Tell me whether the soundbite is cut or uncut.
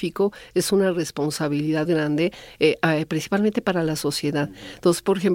cut